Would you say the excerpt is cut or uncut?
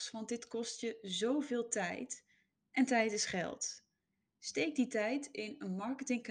uncut